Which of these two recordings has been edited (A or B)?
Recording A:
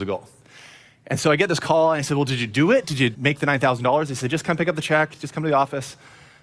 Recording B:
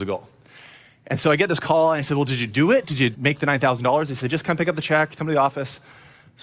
B